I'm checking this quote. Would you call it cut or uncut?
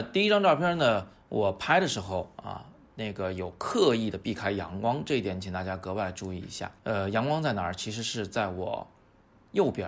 cut